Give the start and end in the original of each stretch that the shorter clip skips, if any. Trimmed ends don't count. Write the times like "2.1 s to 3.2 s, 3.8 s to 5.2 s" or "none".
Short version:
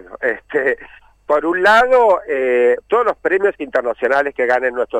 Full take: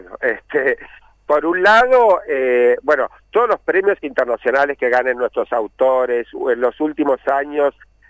2.8 s to 3.2 s